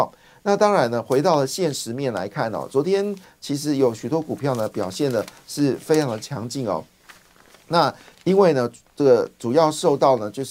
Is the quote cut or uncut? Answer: uncut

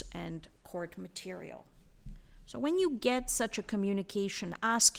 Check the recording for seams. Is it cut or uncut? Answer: uncut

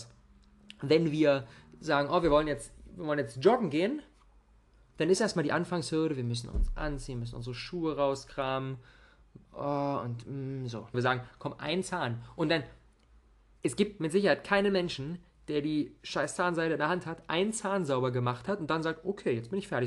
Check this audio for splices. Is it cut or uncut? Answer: cut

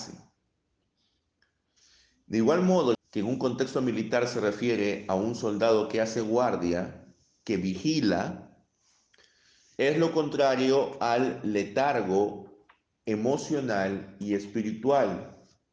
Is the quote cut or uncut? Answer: cut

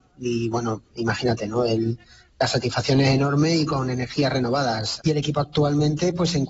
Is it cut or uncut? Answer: cut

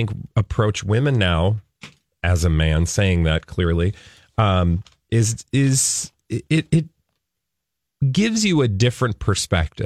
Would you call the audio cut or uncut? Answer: uncut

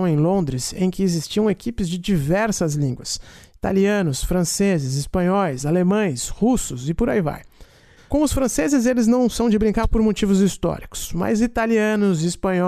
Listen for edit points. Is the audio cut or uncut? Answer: cut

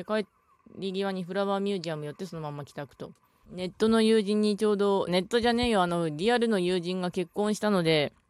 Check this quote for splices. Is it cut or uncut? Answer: cut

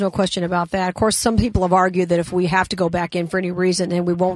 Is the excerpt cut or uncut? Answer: uncut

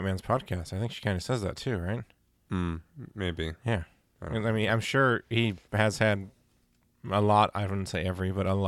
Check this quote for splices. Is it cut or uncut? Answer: uncut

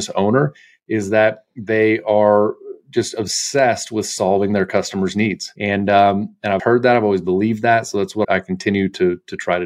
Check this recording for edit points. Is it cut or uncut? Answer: cut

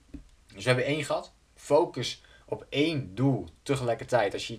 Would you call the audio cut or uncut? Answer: uncut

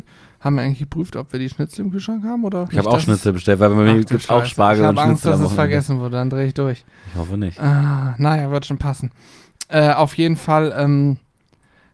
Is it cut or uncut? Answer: cut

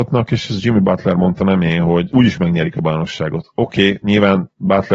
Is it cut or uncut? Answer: uncut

